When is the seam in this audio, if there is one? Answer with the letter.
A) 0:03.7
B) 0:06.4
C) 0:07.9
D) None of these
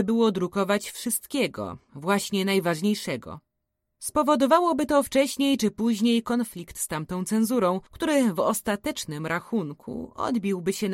C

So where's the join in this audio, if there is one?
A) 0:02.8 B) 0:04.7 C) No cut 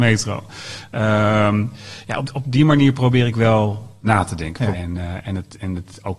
B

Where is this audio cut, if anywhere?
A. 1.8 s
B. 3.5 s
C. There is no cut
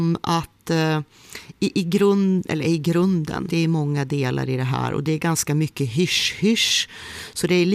B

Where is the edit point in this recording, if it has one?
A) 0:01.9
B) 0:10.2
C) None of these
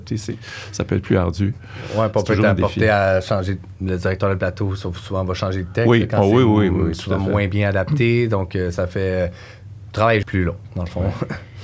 B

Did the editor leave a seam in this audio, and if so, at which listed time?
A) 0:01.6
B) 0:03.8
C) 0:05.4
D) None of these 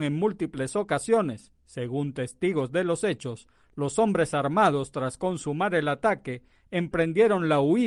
D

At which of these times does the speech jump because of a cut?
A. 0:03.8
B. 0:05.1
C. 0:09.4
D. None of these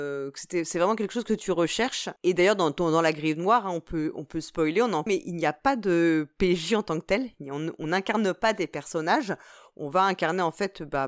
B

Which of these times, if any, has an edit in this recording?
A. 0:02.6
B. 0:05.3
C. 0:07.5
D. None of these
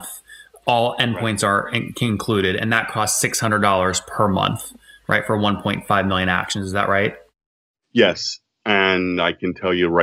D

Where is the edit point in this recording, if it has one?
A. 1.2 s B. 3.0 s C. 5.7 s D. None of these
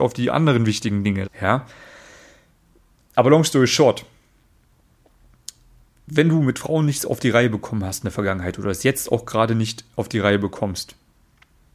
A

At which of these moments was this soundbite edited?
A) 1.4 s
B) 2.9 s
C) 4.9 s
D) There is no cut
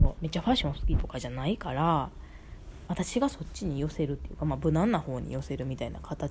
B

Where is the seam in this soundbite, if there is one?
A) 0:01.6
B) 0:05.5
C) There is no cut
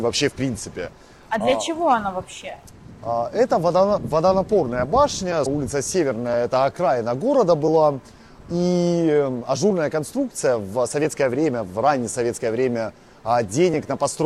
B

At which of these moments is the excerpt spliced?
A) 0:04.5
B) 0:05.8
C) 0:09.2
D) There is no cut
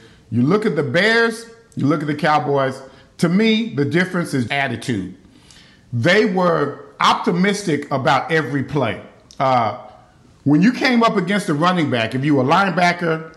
A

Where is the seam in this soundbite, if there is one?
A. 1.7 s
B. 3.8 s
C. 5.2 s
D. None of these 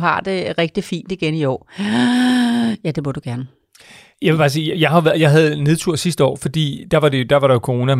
D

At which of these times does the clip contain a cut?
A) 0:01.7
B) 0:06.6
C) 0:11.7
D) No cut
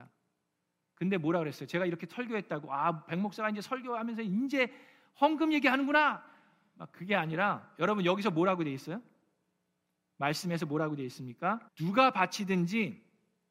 C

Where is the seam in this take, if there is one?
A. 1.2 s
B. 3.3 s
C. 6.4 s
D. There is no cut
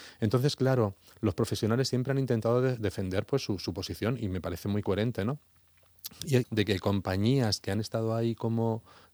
C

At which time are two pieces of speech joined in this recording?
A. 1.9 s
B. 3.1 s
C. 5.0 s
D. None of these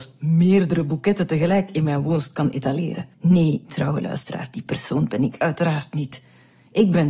B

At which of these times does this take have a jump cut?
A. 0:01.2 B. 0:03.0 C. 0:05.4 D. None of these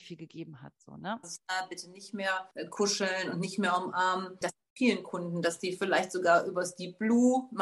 A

